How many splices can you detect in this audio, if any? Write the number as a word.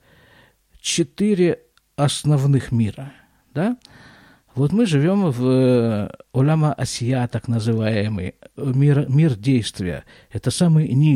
zero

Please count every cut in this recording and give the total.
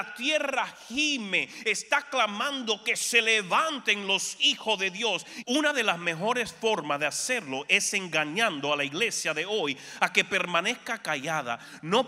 one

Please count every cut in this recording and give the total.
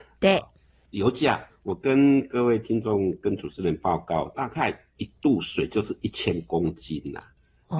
one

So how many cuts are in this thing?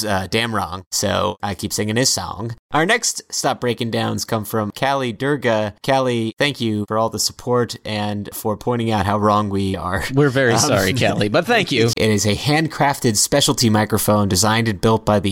one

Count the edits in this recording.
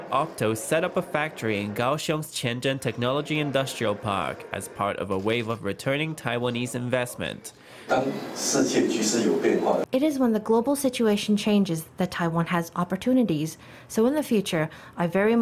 one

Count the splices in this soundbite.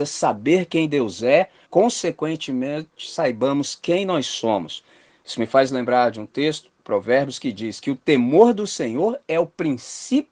one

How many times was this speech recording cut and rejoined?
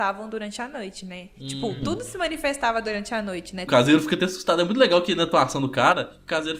one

